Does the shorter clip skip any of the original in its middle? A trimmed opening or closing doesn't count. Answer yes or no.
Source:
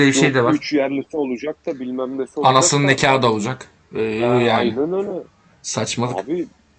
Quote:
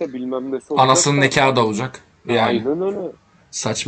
yes